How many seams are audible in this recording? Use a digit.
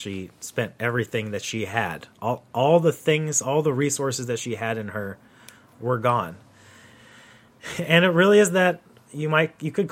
0